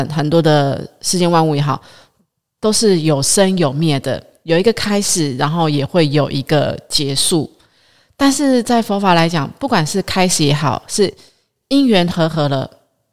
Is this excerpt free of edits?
yes; 0 cuts

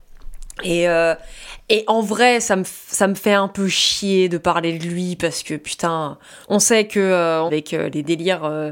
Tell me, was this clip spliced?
yes; 2 cuts; at 6.4 s, 7.5 s

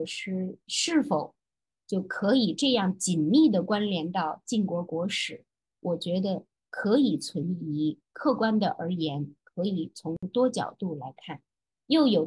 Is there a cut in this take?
no; 0 cuts

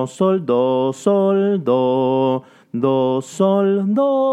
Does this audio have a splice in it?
no; 0 cuts

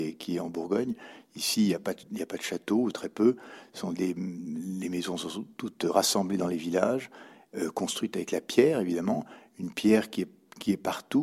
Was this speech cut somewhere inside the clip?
no; 0 cuts

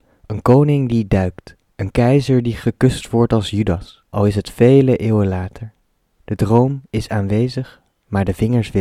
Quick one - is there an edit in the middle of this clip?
yes; 1 cut; at 4.1 s

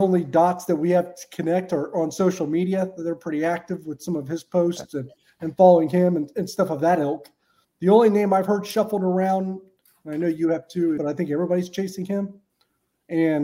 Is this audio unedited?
no; 2 cuts; at 7.6 s, 11.0 s

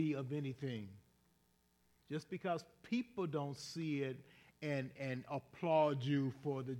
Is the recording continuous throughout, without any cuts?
no; 1 cut; at 2.0 s

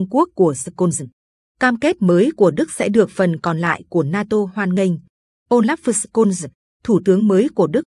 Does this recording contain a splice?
yes; 1 cut; at 5.4 s

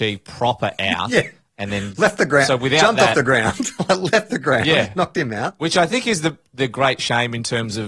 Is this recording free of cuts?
yes; 0 cuts

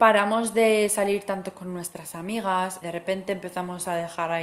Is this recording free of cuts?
no; 1 cut; at 2.8 s

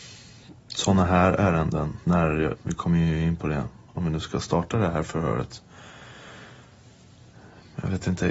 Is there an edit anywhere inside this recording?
yes; 1 cut; at 2.6 s

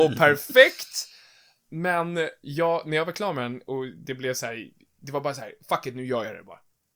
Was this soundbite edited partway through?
no; 0 cuts

